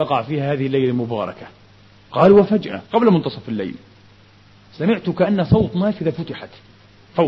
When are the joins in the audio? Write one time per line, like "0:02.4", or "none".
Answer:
0:02.9